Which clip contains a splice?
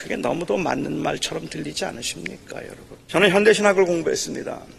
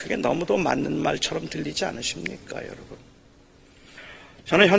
first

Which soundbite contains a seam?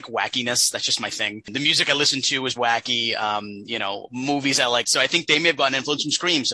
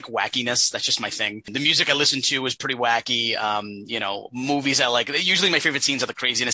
first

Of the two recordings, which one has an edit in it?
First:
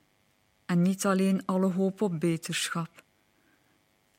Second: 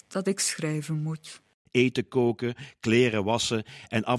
second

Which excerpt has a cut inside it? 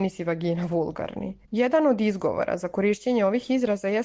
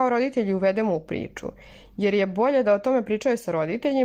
first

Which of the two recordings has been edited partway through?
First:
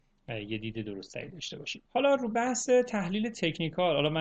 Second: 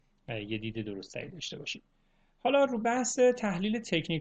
first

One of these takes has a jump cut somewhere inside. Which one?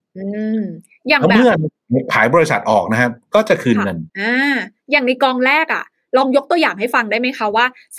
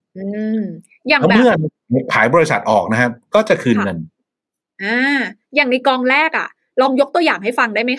first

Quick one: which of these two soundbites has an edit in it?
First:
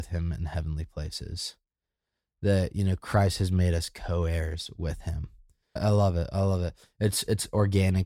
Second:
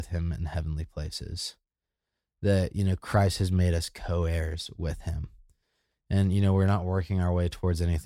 first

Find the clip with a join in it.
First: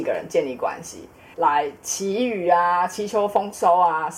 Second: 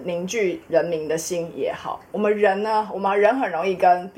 first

